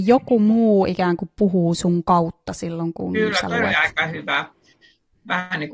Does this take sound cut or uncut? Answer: uncut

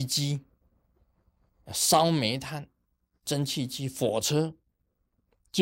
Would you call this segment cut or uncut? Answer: uncut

